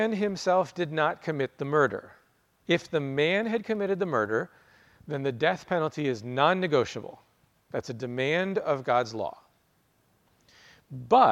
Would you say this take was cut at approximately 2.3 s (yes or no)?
no